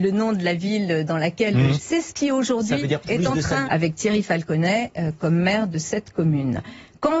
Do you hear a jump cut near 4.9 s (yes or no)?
no